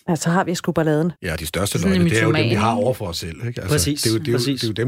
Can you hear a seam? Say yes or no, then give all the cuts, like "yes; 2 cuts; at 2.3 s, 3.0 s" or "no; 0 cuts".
yes; 1 cut; at 1.2 s